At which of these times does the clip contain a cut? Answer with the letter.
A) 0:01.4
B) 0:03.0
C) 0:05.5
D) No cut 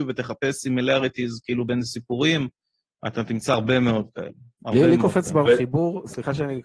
C